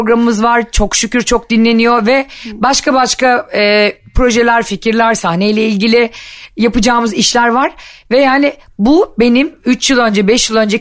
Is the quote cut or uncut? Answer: uncut